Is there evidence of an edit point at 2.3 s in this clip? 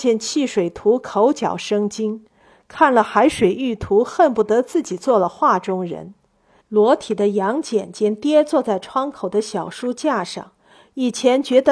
no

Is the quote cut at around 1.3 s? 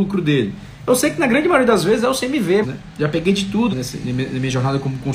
no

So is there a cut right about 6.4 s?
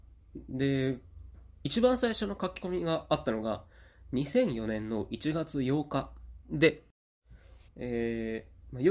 yes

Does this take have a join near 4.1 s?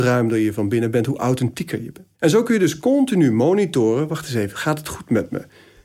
no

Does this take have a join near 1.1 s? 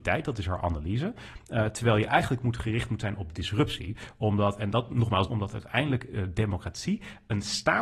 no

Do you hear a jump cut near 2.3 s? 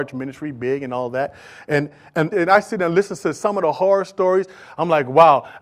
yes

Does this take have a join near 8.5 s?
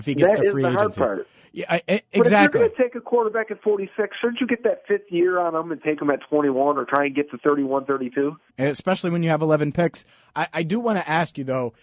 yes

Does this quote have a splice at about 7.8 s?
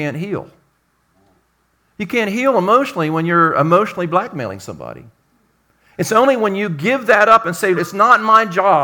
yes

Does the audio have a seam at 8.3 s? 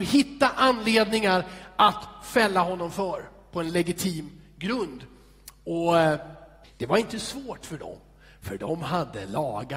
no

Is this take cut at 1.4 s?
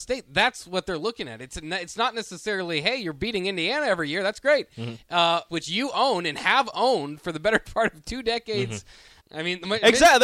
no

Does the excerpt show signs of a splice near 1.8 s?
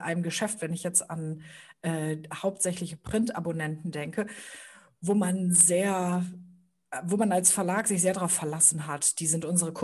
no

